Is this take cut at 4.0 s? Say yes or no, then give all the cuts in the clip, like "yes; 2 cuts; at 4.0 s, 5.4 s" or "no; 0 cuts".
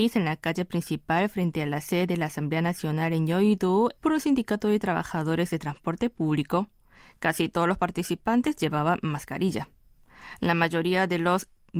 yes; 1 cut; at 4.0 s